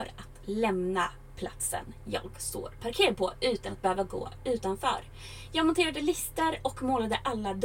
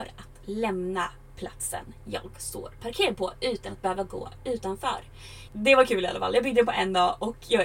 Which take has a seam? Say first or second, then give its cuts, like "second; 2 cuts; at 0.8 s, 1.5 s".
second; 1 cut; at 5.5 s